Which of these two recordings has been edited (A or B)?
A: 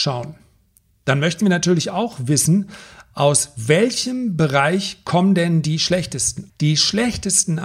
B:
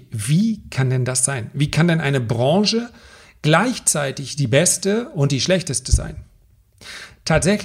A